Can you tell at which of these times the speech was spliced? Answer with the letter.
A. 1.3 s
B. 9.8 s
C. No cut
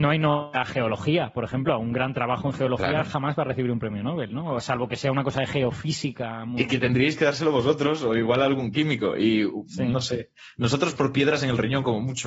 C